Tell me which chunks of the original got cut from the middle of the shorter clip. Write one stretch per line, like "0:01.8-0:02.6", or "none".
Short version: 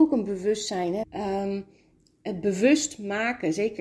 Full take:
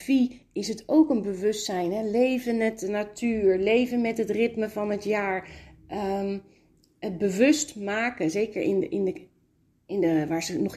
0:02.0-0:05.8